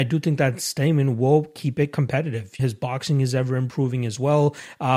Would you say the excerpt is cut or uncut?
cut